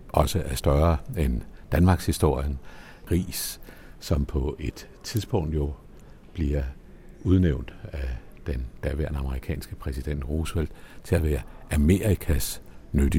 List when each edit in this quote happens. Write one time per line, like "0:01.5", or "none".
0:03.1